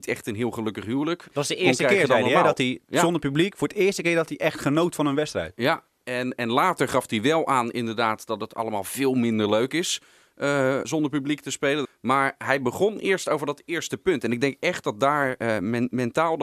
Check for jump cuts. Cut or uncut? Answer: cut